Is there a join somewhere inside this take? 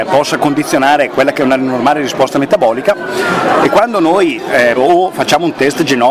yes; 2 cuts; at 3.6 s, 4.8 s

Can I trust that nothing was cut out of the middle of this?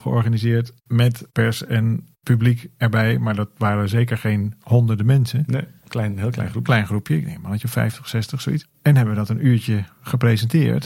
yes; 0 cuts

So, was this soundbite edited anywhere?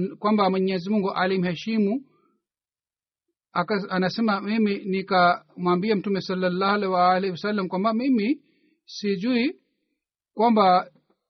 no; 0 cuts

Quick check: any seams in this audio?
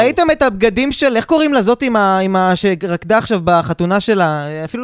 no; 0 cuts

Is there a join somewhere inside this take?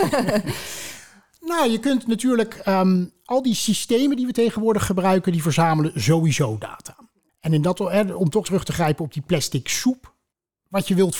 yes; 1 cut; at 8.4 s

